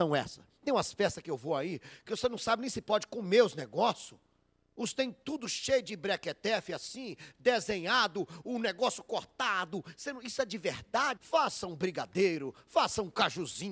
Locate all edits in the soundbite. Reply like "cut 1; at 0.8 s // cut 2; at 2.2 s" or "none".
cut 1; at 11.2 s